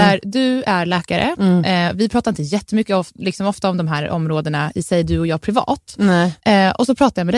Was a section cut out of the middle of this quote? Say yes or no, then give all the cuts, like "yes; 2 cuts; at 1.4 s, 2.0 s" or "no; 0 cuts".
yes; 1 cut; at 6.4 s